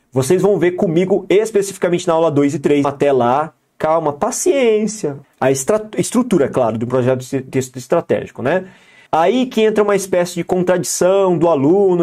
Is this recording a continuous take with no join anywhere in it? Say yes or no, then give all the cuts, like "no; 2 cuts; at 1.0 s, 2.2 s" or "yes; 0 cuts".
no; 3 cuts; at 2.8 s, 5.2 s, 9.1 s